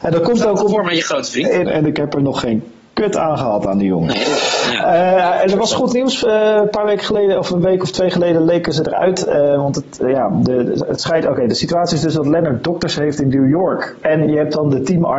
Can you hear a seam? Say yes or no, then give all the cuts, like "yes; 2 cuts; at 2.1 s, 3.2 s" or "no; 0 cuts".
yes; 2 cuts; at 1.6 s, 14.0 s